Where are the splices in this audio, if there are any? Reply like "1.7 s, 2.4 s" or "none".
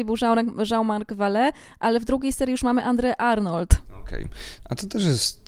4.6 s